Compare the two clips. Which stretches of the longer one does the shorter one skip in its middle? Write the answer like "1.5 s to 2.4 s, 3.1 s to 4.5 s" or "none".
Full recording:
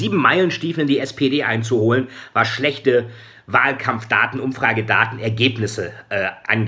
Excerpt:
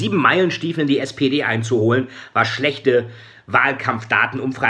none

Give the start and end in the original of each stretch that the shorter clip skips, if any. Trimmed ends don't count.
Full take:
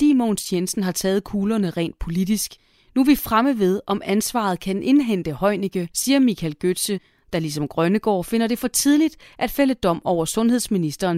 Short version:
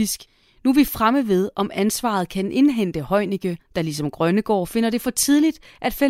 5.9 s to 7.2 s

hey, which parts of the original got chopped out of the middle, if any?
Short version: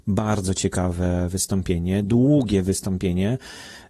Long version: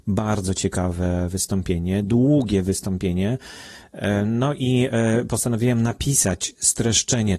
none

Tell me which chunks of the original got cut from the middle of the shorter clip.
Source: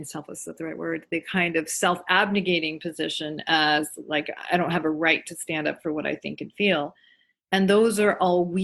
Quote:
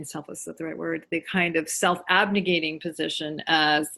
none

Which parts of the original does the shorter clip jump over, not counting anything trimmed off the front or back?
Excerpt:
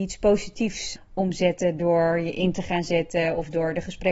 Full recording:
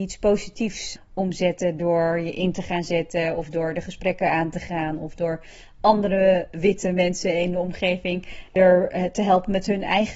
none

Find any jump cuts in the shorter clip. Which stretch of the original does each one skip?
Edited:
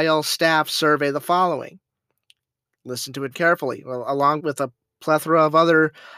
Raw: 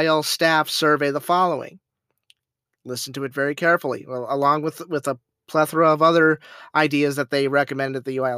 3.3 s to 3.6 s, 4.6 s to 4.9 s

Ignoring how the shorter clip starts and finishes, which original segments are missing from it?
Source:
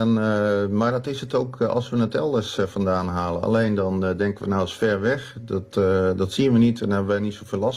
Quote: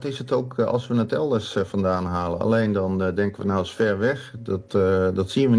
none

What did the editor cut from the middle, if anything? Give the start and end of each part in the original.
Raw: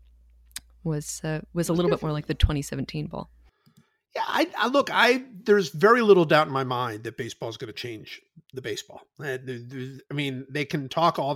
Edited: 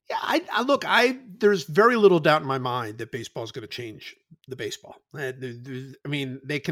none

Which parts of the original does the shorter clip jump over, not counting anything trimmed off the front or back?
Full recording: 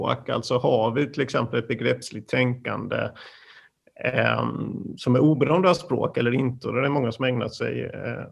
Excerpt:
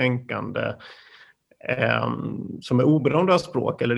none

